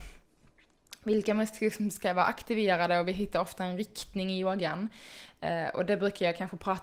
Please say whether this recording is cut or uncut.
uncut